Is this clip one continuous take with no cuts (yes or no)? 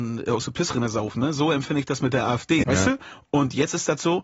no